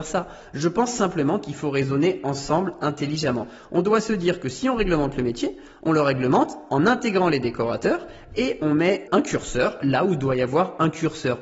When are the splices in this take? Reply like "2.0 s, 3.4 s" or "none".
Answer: 9.1 s